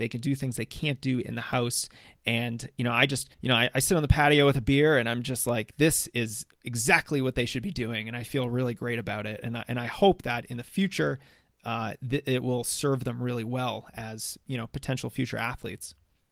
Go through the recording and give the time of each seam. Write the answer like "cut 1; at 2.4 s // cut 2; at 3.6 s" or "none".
cut 1; at 3.3 s